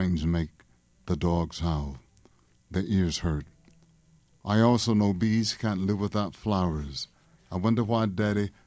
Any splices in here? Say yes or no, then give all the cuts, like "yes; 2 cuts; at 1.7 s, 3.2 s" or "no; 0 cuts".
no; 0 cuts